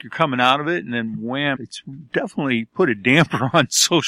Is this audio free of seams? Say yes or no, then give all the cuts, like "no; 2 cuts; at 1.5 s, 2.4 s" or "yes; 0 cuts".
no; 1 cut; at 1.5 s